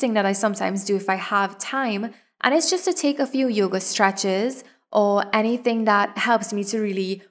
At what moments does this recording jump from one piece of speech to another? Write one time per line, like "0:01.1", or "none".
none